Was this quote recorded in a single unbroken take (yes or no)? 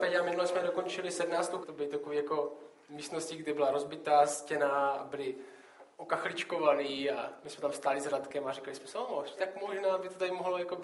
no